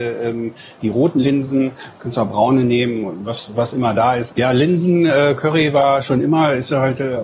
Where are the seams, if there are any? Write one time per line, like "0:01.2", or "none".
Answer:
0:04.3

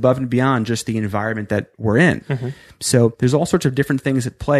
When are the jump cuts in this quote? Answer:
0:02.2

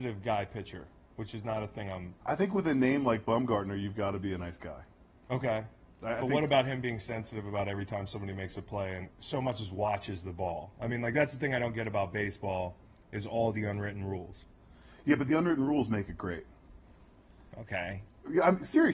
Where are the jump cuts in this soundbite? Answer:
0:02.2
0:09.1

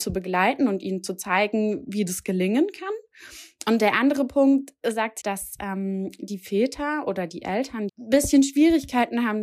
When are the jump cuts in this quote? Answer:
0:05.2
0:07.9

